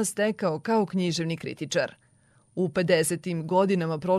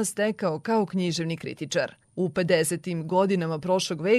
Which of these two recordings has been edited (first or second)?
second